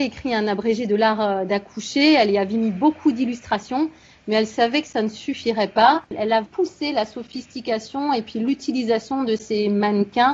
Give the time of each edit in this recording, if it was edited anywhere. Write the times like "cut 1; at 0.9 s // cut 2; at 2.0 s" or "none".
cut 1; at 6.4 s